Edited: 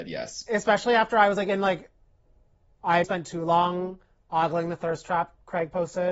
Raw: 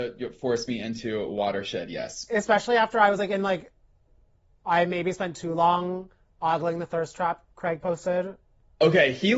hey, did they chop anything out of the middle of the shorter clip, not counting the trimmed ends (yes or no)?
yes